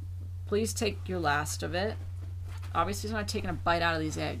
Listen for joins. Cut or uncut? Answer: uncut